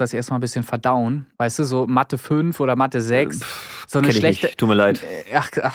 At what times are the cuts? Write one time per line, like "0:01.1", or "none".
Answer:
0:01.3